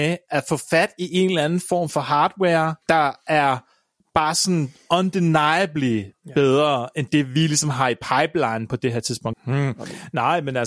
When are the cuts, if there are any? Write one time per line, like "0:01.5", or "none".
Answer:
0:02.8
0:09.3

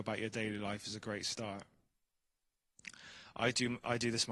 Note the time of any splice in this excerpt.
none

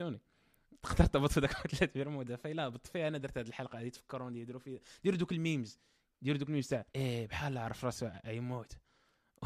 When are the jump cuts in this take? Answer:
0:06.9

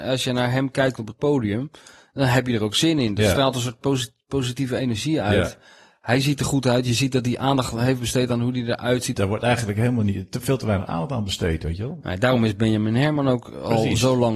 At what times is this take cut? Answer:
0:09.1

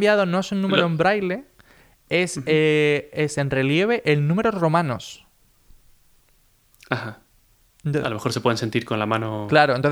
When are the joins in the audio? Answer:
none

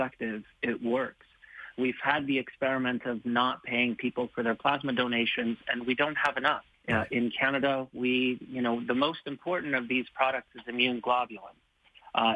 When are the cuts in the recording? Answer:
0:06.7

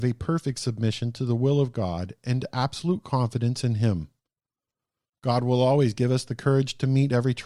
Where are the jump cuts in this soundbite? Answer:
none

